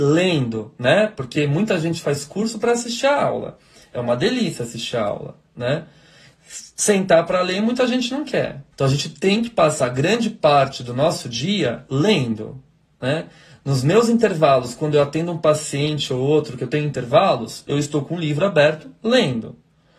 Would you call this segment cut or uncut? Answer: cut